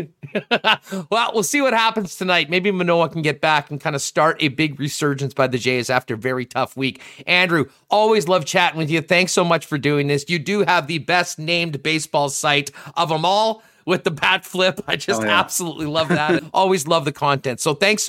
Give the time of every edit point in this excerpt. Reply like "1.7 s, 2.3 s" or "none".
16.4 s